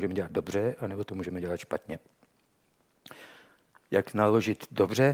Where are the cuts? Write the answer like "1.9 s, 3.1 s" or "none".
none